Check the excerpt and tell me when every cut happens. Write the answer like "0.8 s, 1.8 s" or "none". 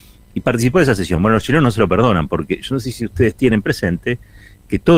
none